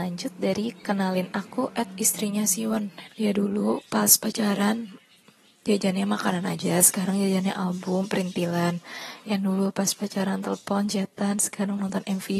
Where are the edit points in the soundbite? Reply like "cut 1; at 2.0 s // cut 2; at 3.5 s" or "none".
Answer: cut 1; at 3.1 s